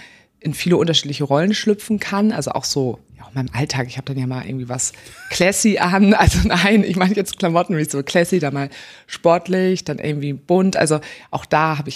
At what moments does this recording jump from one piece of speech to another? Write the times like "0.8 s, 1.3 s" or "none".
none